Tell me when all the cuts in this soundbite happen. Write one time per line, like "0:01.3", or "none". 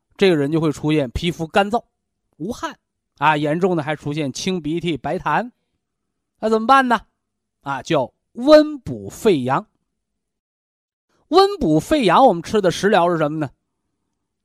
0:03.1